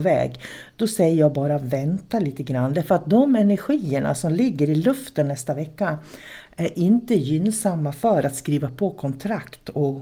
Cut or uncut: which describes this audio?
uncut